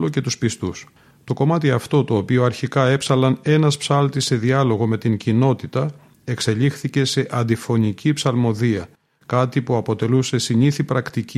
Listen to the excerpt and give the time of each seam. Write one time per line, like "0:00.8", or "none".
none